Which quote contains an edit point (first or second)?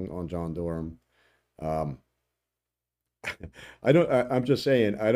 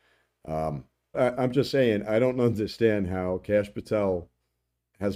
second